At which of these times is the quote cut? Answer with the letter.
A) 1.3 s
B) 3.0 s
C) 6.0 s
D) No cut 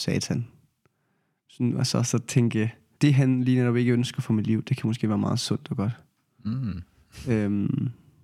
B